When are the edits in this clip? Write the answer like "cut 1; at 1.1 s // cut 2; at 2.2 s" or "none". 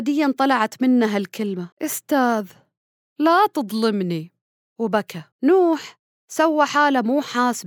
cut 1; at 1.7 s // cut 2; at 5.3 s

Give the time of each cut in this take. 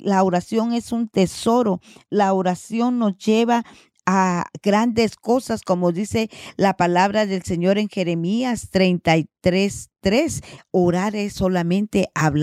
cut 1; at 10.6 s

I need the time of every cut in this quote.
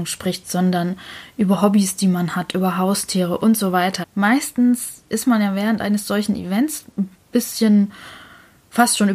cut 1; at 4.0 s

